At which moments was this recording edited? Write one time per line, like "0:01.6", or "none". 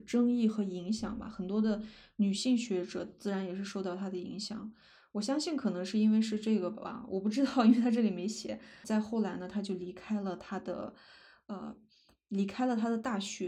0:08.8